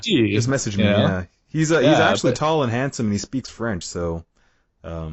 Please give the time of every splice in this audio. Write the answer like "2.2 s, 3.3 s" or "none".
none